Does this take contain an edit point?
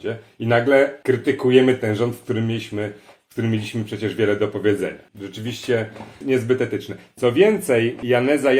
no; 0 cuts

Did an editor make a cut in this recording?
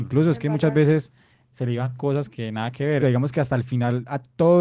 yes; 1 cut; at 3.0 s

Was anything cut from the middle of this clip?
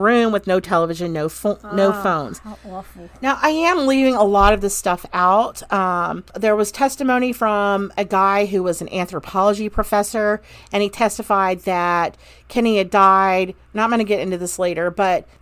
no; 0 cuts

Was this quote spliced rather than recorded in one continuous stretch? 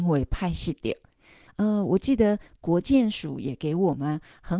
yes; 1 cut; at 1.5 s

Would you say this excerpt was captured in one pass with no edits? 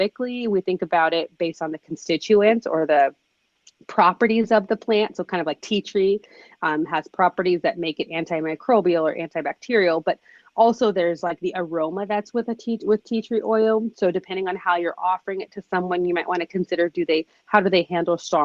yes; 0 cuts

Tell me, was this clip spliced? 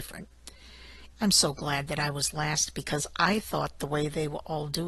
yes; 1 cut; at 1.1 s

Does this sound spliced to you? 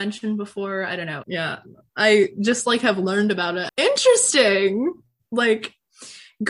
yes; 2 cuts; at 1.2 s, 3.7 s

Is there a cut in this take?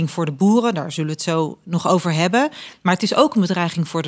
no; 0 cuts

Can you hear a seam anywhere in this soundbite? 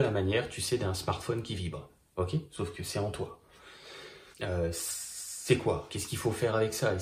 yes; 2 cuts; at 4.3 s, 5.9 s

